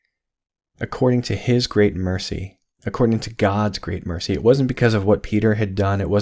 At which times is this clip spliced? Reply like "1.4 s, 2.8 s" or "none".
none